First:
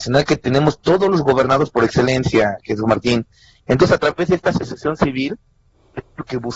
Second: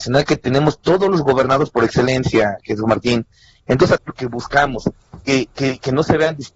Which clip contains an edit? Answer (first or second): second